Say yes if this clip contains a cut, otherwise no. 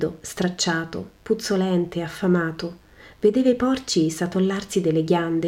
no